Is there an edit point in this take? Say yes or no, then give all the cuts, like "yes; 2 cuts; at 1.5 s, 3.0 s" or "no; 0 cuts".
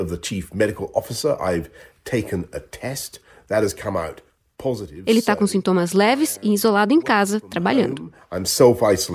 no; 0 cuts